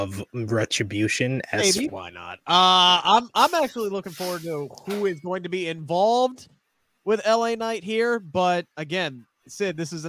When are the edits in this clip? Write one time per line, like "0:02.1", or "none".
0:01.9